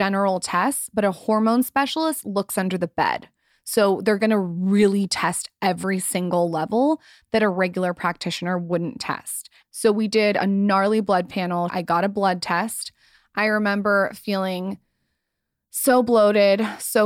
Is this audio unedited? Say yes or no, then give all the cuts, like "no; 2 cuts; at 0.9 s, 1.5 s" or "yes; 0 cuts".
no; 2 cuts; at 9.6 s, 11.7 s